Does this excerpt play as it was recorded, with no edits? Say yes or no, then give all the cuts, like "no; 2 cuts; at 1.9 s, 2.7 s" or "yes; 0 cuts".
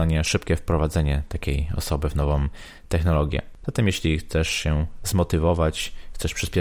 no; 1 cut; at 3.6 s